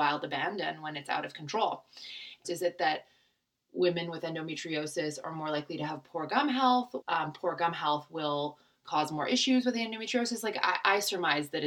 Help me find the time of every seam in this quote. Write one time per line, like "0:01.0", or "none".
0:02.4
0:07.0